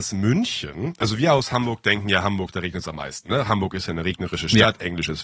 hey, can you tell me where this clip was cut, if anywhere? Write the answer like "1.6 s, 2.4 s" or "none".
none

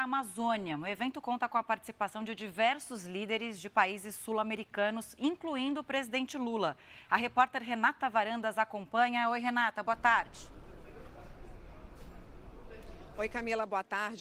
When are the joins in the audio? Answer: none

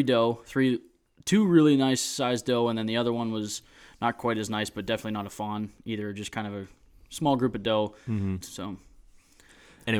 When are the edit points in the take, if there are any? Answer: 8.4 s

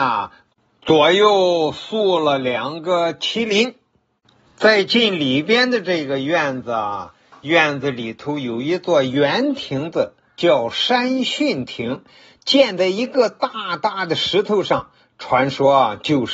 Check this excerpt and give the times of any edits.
none

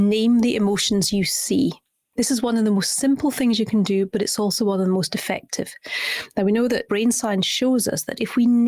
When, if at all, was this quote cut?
none

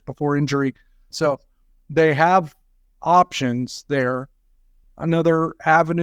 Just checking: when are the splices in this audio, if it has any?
1.1 s, 4.8 s

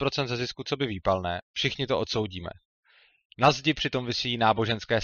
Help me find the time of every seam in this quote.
3.3 s

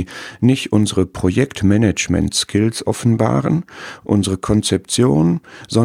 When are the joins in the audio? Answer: 4.0 s

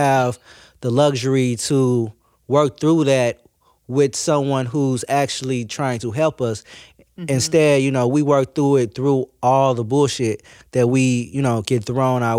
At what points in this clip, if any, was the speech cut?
none

